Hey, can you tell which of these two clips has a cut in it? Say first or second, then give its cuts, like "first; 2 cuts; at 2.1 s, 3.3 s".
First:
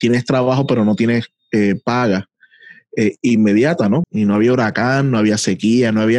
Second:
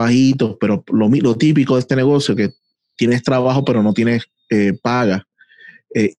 first; 1 cut; at 4.0 s